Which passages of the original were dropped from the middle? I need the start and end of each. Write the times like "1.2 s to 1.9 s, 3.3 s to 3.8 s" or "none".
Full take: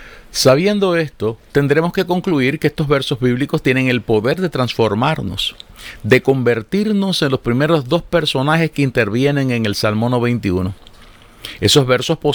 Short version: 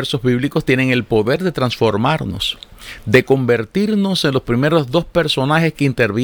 none